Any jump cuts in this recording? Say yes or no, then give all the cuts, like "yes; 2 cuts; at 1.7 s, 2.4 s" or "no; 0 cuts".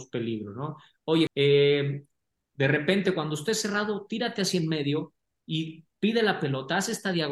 yes; 1 cut; at 1.3 s